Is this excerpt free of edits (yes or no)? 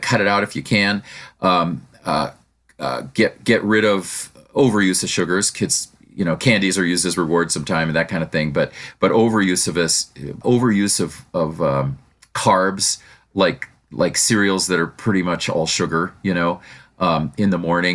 no